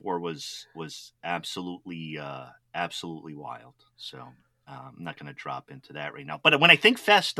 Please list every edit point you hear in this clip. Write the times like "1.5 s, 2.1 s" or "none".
none